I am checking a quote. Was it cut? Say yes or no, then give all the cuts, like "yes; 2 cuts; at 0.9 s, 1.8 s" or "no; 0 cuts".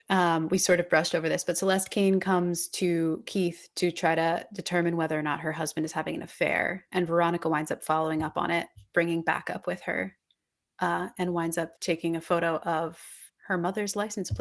yes; 1 cut; at 11.8 s